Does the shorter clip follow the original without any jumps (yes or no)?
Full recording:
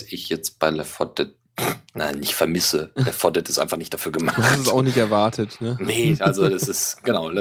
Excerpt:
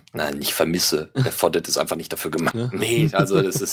no